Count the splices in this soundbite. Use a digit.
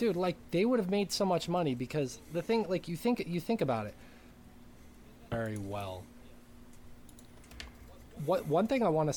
1